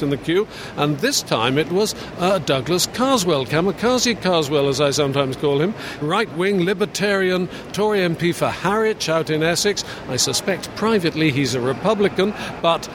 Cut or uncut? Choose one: cut